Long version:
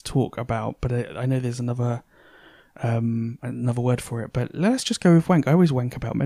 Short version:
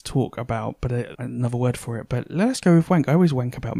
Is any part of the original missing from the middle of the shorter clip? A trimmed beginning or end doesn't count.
yes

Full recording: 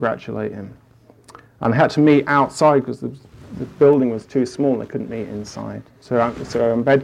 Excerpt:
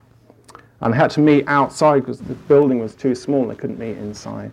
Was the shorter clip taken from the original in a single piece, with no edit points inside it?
no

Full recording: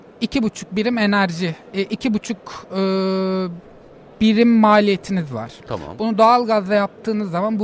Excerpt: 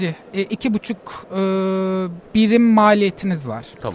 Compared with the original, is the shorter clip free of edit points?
no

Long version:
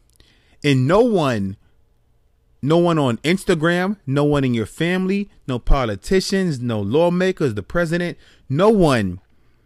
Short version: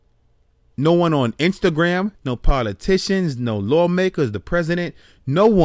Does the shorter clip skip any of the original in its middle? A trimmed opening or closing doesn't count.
yes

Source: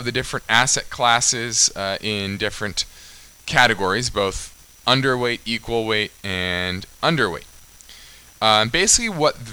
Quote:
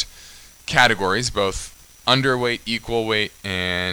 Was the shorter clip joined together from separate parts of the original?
no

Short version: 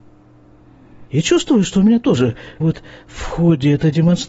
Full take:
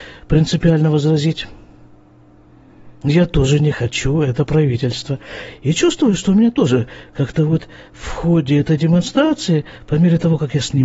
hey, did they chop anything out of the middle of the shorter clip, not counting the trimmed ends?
yes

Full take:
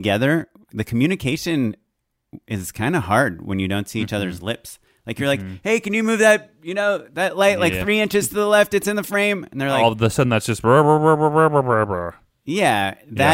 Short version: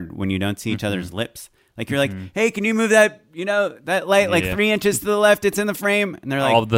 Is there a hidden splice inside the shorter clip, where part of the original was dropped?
no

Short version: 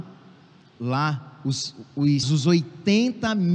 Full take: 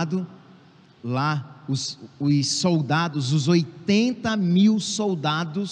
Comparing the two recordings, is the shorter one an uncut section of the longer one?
no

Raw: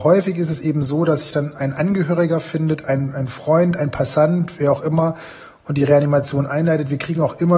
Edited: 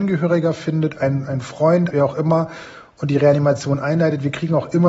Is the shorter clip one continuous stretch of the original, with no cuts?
no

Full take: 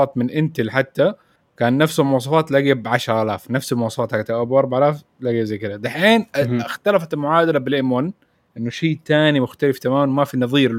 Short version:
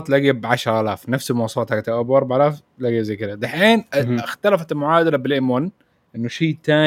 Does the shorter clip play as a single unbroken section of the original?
yes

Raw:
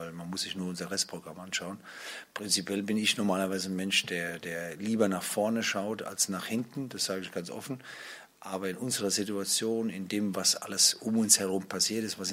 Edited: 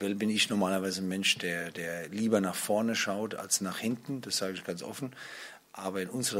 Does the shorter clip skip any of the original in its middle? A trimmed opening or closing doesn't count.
no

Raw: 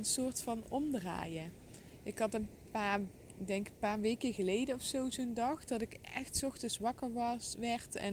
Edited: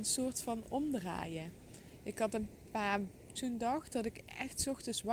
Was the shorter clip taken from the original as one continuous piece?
no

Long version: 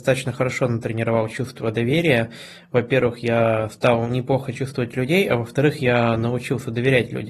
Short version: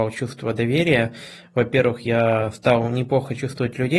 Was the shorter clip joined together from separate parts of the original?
no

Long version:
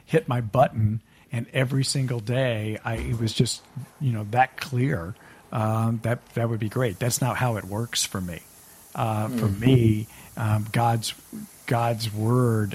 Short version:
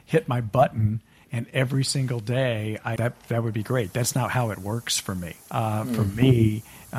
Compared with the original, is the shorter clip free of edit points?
no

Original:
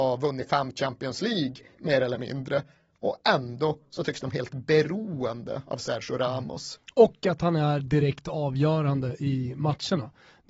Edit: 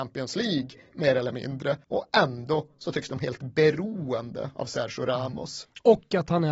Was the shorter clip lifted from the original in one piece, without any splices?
no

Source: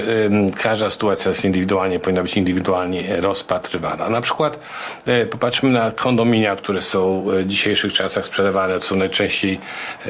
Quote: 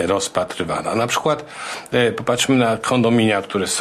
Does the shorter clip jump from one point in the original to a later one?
no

